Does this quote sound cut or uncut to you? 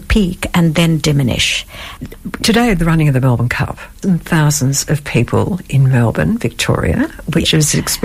cut